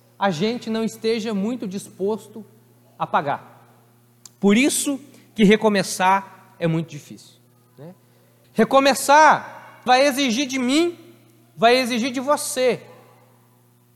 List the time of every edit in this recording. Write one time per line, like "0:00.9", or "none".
0:08.4
0:09.9